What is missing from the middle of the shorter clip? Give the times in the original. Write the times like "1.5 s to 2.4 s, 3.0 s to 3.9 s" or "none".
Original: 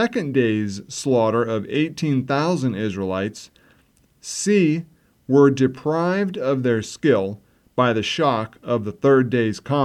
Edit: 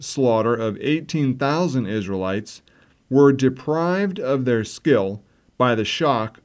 3.9 s to 5.2 s